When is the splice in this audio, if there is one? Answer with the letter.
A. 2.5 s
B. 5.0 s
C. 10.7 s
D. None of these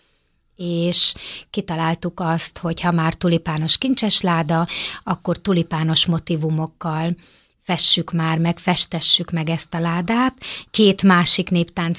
C